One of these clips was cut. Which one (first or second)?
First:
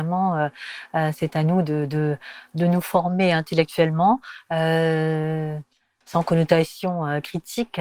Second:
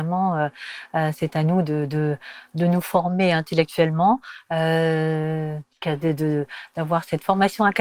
second